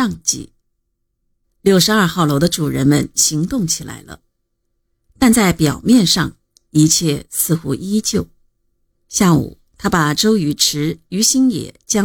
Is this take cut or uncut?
cut